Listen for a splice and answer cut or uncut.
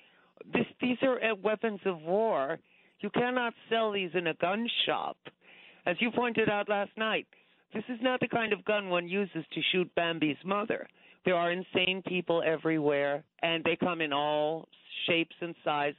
cut